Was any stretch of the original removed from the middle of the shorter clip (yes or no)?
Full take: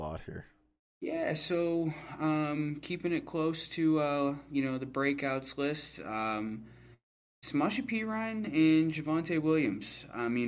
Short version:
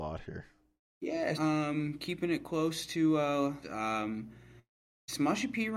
yes